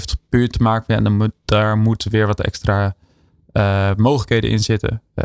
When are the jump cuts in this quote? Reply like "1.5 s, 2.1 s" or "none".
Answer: none